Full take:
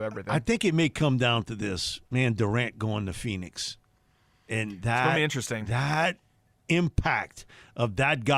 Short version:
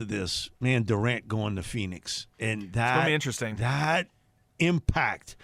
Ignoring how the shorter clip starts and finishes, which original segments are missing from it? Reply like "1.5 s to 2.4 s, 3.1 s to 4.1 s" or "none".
3.8 s to 4.4 s